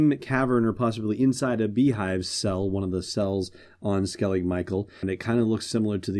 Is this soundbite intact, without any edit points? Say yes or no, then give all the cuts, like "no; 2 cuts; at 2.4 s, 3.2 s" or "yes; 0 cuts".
no; 1 cut; at 5.0 s